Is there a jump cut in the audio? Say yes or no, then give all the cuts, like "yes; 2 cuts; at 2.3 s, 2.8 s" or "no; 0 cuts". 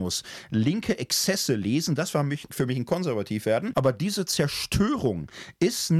yes; 1 cut; at 3.7 s